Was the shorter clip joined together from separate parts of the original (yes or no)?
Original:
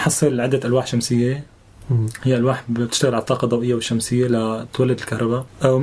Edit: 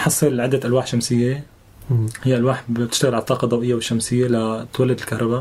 no